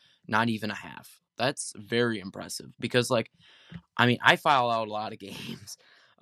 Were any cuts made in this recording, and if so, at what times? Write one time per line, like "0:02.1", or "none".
0:01.3